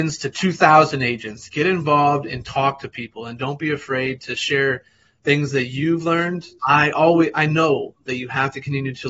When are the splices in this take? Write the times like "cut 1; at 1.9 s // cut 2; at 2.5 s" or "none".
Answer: cut 1; at 6.6 s